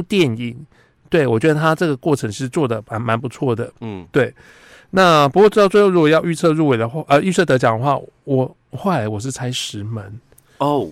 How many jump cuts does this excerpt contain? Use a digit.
0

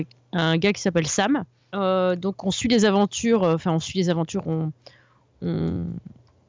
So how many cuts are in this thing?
1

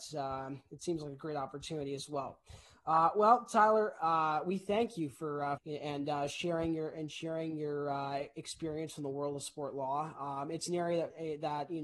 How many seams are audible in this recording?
1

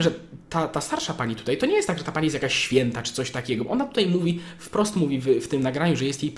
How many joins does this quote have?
0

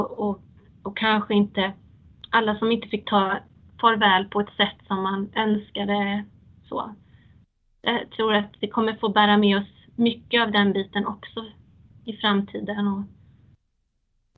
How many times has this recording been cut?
0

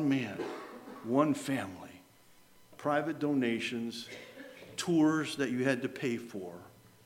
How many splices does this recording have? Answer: 1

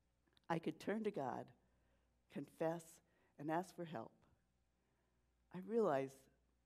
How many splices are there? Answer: 0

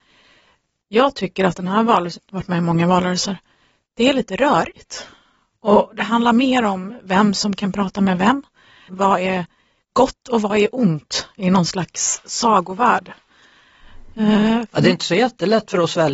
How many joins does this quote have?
2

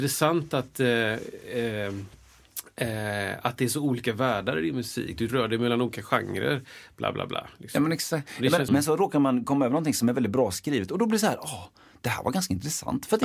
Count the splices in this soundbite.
1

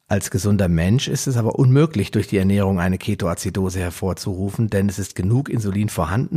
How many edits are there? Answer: 0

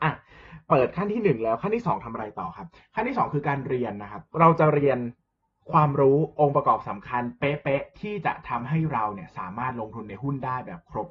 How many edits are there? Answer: 1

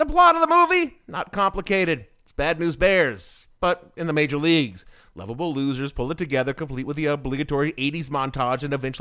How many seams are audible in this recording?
0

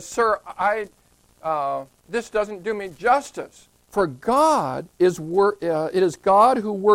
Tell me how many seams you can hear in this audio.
2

